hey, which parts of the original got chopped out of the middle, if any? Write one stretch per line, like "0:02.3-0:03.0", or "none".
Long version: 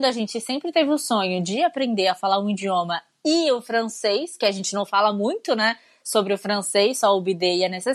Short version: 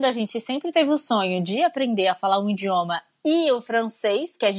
none